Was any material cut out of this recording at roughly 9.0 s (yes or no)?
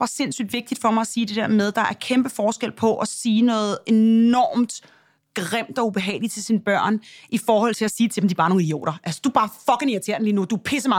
no